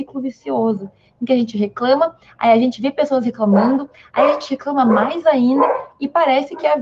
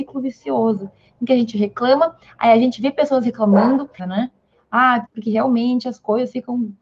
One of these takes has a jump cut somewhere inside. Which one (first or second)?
second